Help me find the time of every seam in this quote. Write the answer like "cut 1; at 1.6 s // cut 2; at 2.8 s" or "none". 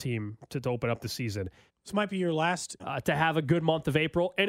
cut 1; at 1.7 s // cut 2; at 2.8 s